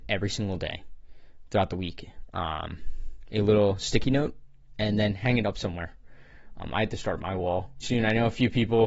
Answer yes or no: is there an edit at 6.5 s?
no